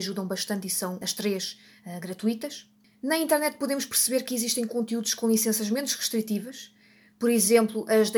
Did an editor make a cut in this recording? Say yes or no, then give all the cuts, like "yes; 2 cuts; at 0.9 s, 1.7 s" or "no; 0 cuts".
no; 0 cuts